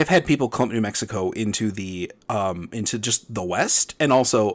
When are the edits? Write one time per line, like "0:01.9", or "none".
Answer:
0:02.2